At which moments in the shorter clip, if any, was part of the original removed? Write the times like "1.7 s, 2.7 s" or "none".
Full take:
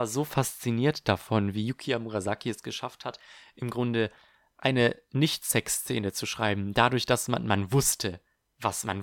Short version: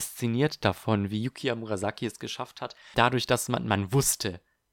2.9 s